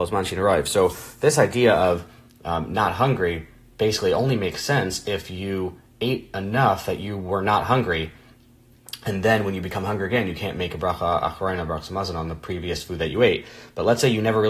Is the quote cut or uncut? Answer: uncut